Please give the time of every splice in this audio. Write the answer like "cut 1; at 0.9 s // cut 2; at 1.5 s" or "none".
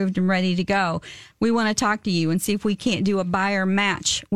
cut 1; at 1.3 s